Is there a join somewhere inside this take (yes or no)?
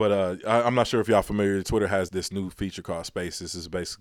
yes